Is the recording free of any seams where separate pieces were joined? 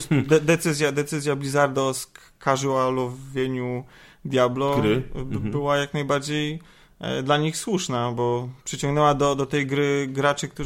yes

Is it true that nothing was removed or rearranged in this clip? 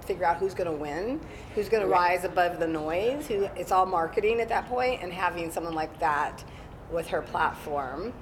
yes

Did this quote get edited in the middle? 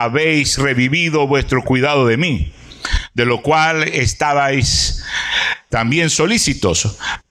no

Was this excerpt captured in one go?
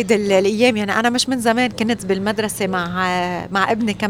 yes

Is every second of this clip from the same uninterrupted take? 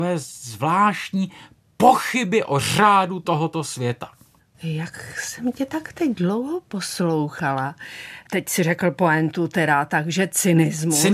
yes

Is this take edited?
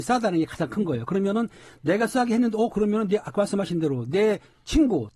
no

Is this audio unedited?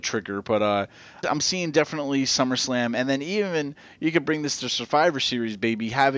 no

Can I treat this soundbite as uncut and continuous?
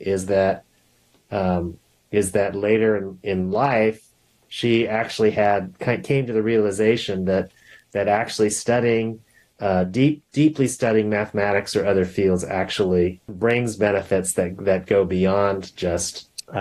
yes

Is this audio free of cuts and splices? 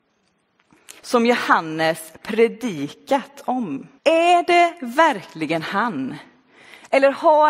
no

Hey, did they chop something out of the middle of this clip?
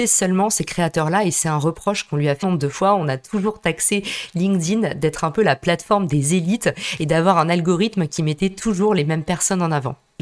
yes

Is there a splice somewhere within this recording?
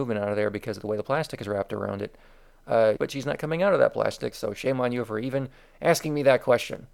yes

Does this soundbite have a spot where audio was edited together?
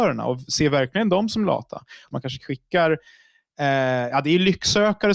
yes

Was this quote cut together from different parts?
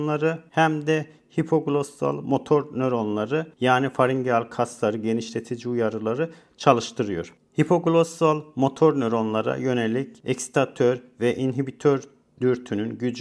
yes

